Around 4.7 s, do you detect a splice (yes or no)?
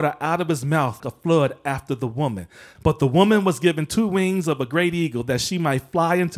no